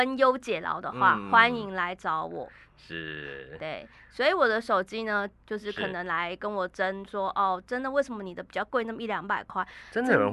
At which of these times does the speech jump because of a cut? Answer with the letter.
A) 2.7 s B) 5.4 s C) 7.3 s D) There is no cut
B